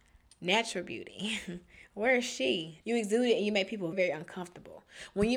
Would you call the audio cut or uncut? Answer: cut